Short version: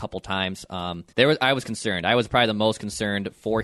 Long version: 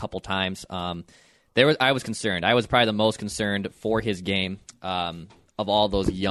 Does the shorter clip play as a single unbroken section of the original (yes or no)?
no